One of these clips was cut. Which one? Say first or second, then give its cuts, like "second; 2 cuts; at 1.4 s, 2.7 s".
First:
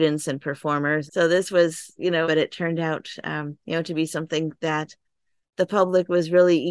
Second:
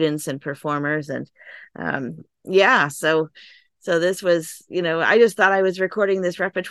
first; 3 cuts; at 1.1 s, 2.2 s, 3.6 s